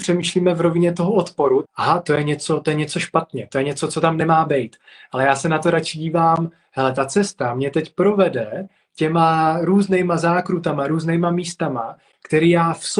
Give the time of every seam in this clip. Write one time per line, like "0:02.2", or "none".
0:01.6